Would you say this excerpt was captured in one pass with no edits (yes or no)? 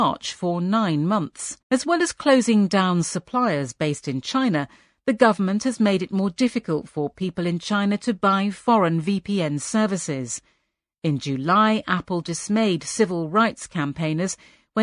no